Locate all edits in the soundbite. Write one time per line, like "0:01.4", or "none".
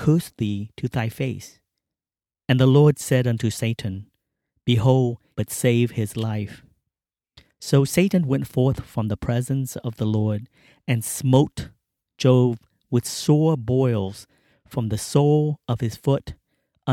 0:05.3